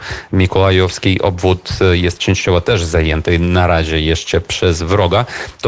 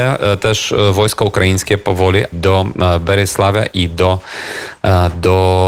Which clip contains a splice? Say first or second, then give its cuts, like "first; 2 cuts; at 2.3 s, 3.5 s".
second; 1 cut; at 2.3 s